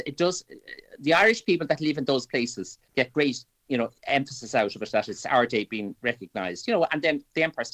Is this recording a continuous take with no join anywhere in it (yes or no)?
yes